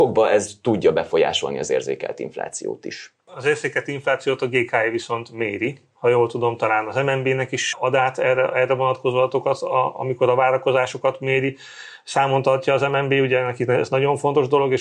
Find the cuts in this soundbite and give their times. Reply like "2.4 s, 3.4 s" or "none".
none